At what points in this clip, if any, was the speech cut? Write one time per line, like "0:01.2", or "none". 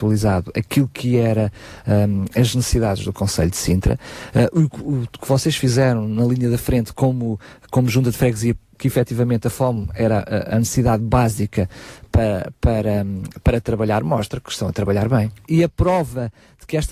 0:08.7
0:15.5